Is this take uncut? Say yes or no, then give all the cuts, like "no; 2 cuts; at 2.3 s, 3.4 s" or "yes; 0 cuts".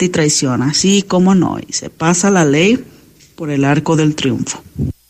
yes; 0 cuts